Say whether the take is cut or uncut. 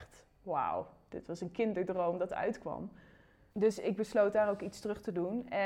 cut